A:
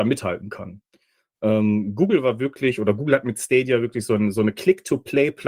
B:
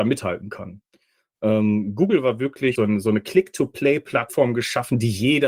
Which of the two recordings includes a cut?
B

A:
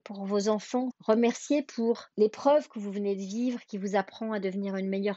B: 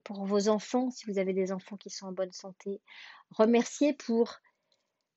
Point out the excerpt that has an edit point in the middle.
A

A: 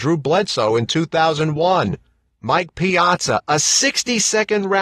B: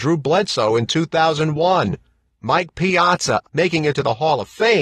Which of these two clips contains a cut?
B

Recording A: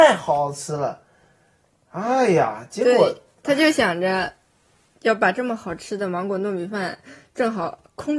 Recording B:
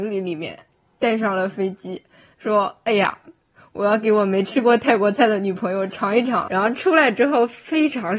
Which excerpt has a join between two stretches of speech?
B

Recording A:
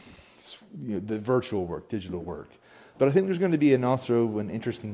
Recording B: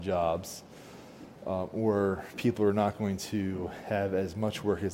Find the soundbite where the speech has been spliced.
A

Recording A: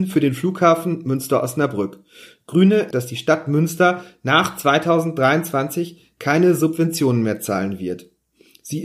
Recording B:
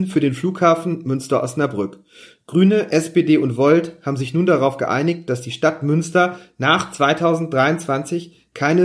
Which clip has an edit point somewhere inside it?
A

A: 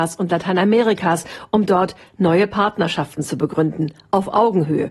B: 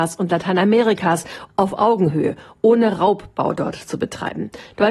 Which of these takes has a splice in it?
B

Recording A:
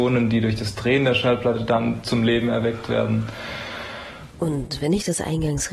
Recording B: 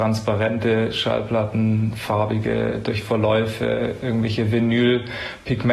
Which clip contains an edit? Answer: A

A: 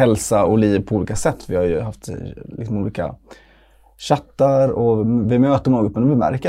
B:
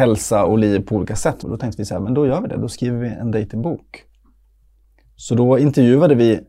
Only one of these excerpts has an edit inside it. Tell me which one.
B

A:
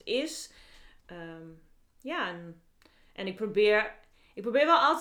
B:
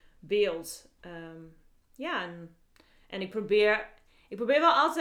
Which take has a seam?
A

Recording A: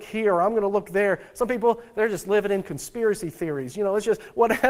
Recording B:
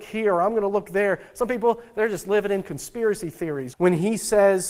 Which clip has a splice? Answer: B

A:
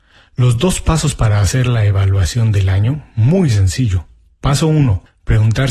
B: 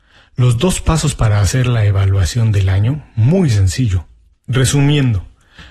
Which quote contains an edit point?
B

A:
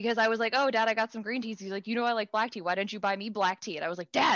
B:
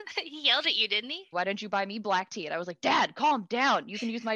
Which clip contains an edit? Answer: B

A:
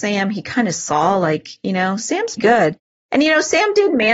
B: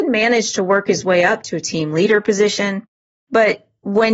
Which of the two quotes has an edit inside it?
A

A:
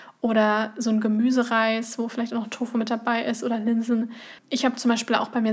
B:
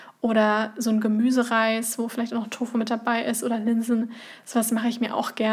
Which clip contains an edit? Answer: A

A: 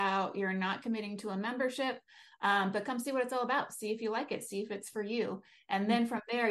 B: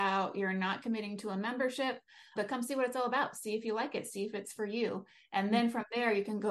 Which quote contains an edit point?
B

